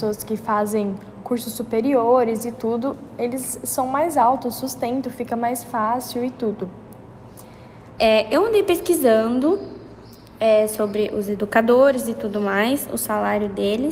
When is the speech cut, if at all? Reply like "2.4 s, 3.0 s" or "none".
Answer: 8.0 s